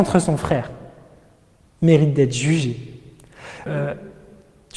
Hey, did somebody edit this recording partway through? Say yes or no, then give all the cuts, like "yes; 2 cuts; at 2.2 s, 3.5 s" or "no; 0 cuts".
yes; 1 cut; at 3.7 s